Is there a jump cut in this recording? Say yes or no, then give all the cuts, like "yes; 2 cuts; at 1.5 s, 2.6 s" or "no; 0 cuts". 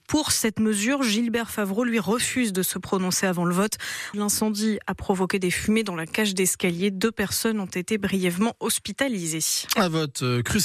yes; 1 cut; at 4.1 s